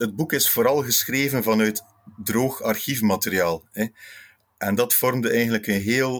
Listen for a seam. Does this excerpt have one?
no; 0 cuts

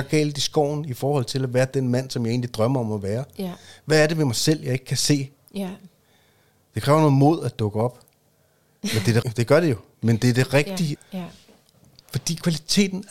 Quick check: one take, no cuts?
no; 2 cuts; at 9.2 s, 11.0 s

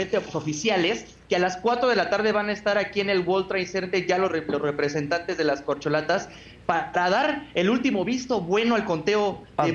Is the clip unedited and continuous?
yes; 0 cuts

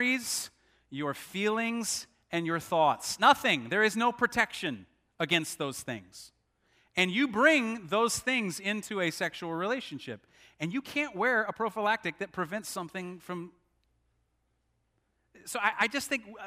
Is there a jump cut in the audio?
no; 0 cuts

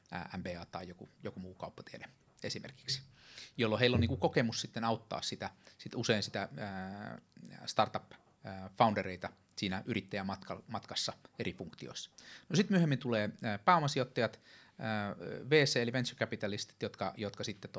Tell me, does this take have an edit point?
no; 0 cuts

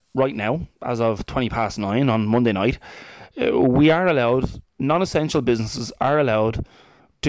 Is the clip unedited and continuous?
yes; 0 cuts

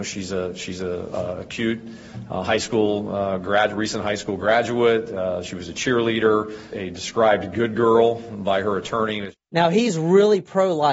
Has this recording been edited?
yes; 1 cut; at 6.7 s

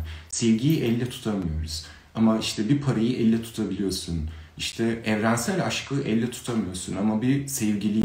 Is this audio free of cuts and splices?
yes; 0 cuts

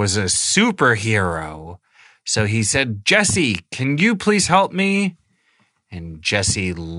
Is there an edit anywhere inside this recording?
no; 0 cuts

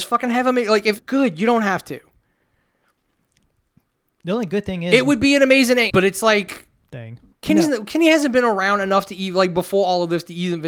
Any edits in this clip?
yes; 3 cuts; at 1.0 s, 5.9 s, 7.3 s

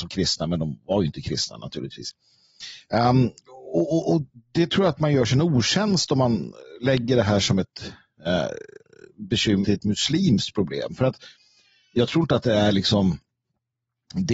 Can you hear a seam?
yes; 1 cut; at 9.6 s

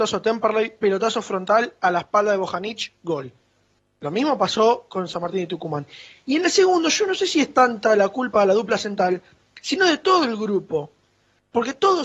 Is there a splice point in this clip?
no; 0 cuts

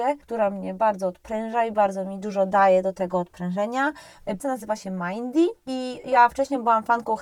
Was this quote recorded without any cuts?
no; 1 cut; at 4.4 s

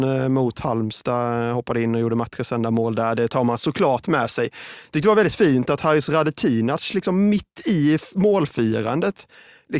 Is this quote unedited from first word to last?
yes; 0 cuts

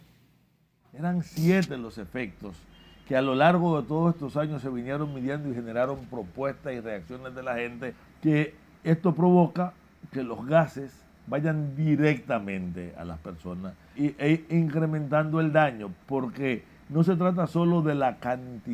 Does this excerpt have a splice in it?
yes; 2 cuts; at 8.1 s, 14.0 s

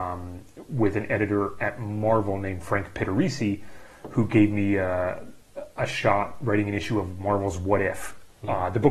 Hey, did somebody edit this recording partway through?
no; 0 cuts

